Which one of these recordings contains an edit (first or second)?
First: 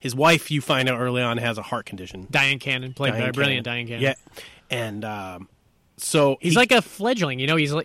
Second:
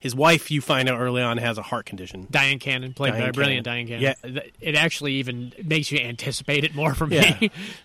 second